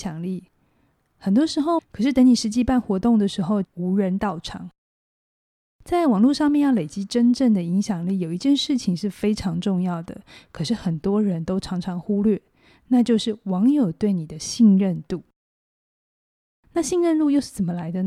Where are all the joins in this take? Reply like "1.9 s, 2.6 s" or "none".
1.8 s, 3.6 s